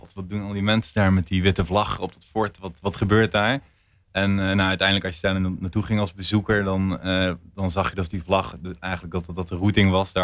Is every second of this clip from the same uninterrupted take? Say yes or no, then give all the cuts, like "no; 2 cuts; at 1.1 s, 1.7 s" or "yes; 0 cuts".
yes; 0 cuts